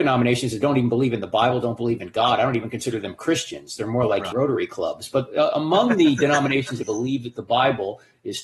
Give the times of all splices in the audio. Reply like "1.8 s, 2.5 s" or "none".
4.3 s, 6.8 s